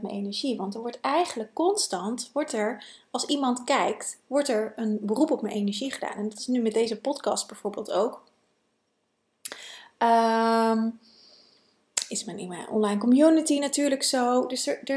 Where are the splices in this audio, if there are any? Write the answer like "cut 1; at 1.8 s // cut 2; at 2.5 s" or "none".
none

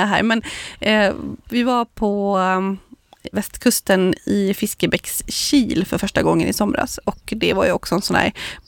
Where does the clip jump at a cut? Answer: cut 1; at 3.3 s

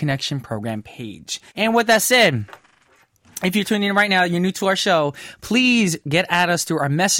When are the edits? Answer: cut 1; at 1.5 s

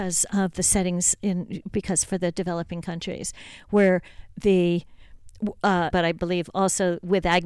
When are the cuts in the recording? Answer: cut 1; at 5.9 s

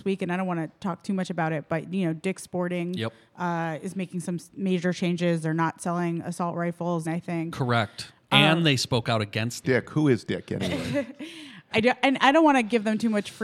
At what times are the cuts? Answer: cut 1; at 7.0 s // cut 2; at 9.6 s // cut 3; at 11.7 s

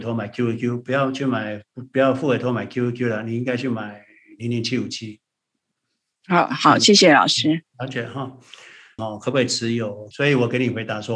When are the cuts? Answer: cut 1; at 9.0 s // cut 2; at 10.1 s

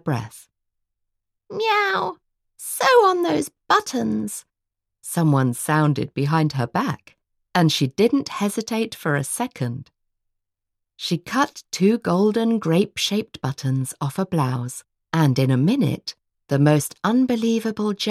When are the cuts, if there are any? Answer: none

